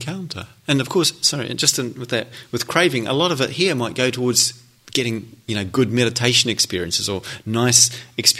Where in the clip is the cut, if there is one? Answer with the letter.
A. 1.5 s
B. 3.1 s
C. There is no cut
C